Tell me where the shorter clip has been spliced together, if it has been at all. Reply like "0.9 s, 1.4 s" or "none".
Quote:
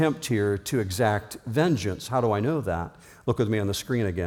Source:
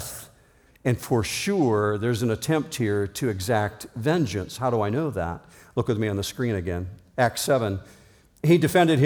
none